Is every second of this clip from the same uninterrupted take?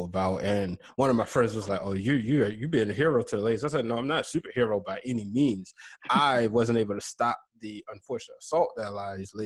yes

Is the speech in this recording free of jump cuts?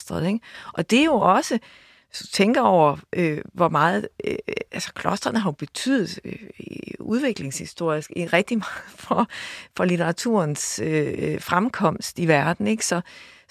yes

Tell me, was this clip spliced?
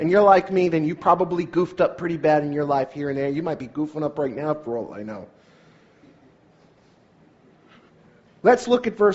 no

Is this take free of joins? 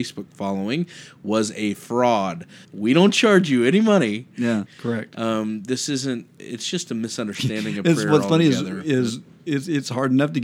no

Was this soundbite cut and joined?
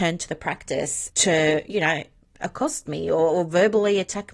yes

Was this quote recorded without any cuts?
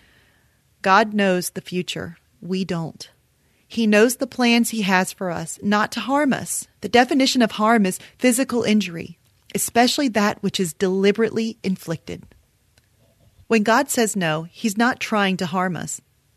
no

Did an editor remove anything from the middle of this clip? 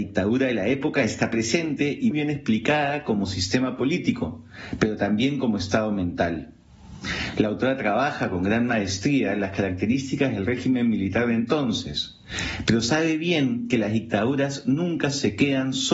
yes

